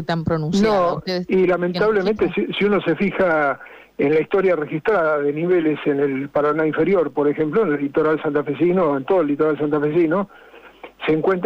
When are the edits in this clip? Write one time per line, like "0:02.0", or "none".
none